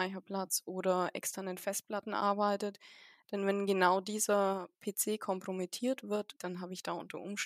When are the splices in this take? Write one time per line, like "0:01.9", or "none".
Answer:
0:06.4